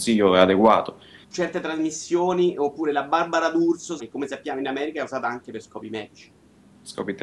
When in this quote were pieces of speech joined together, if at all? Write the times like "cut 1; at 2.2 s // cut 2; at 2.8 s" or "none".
cut 1; at 1.2 s // cut 2; at 4.0 s